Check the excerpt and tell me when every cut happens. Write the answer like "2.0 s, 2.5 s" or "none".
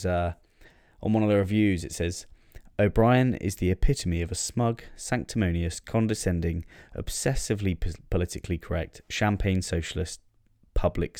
none